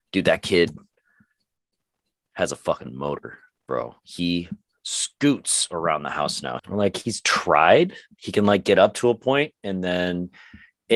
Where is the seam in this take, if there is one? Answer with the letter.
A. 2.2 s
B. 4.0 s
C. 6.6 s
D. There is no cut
C